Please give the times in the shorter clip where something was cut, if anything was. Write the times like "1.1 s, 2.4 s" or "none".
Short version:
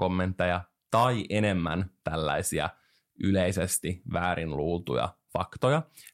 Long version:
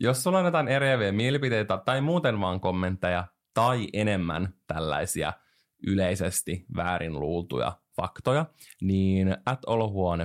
none